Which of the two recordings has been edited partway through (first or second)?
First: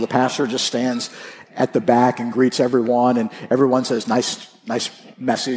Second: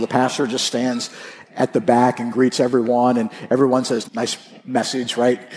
second